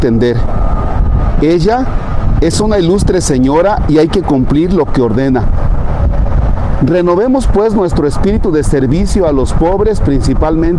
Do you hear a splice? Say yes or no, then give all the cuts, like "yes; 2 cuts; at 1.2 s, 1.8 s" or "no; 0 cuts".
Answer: no; 0 cuts